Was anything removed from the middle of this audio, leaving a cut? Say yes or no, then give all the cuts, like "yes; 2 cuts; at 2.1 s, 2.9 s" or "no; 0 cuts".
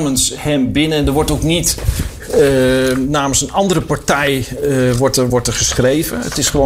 yes; 1 cut; at 5.3 s